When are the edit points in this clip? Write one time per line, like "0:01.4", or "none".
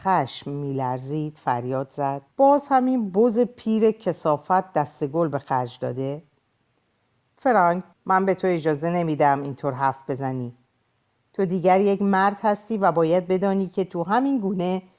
0:02.3
0:07.9